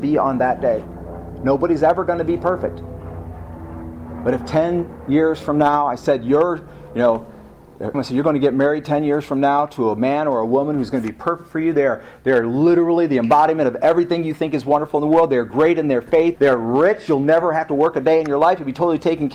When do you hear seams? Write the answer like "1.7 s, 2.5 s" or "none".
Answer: 7.9 s, 16.4 s